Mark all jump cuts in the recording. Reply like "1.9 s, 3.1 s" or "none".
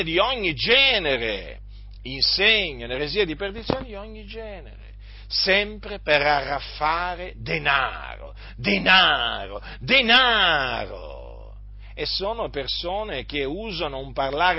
none